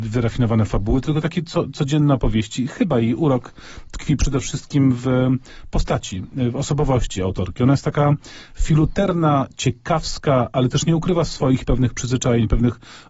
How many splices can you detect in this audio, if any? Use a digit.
0